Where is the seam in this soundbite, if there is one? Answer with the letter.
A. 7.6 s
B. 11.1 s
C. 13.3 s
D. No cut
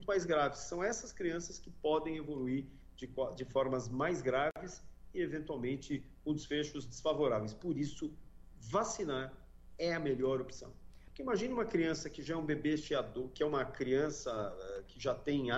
B